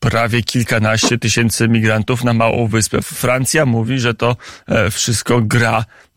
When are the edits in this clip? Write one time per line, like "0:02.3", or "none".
0:03.0